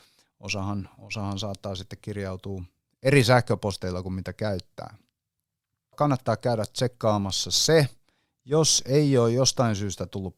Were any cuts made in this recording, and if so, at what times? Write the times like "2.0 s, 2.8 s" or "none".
5.9 s